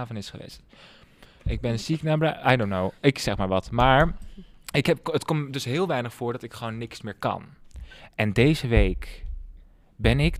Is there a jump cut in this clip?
no; 0 cuts

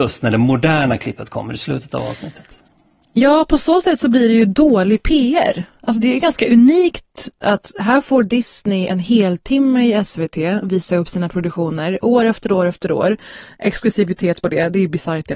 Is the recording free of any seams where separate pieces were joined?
yes; 0 cuts

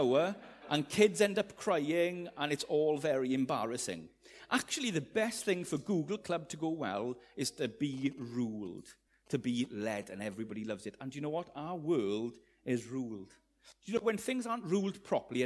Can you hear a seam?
no; 0 cuts

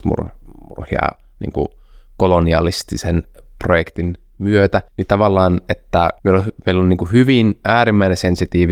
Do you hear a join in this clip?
yes; 2 cuts; at 4.9 s, 6.2 s

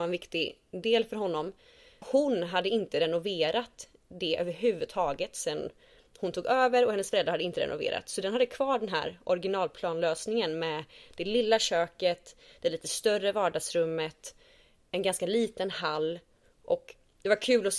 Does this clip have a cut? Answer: yes; 1 cut; at 2.0 s

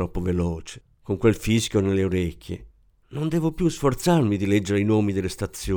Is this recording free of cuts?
yes; 0 cuts

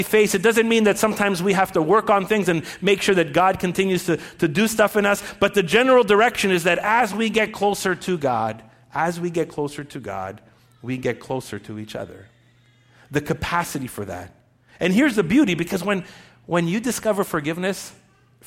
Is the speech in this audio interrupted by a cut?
no; 0 cuts

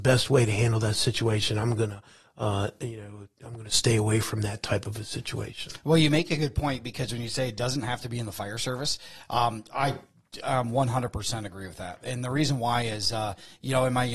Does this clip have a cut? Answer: no; 0 cuts

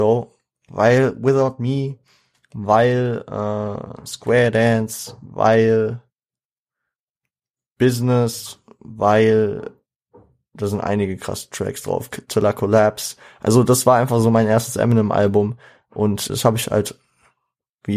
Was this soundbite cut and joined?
yes; 1 cut; at 16.3 s

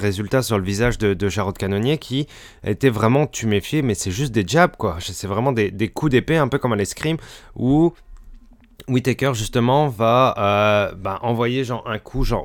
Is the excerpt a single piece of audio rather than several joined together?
yes; 0 cuts

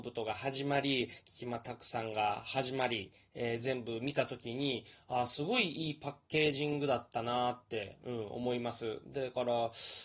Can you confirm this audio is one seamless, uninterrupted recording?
yes; 0 cuts

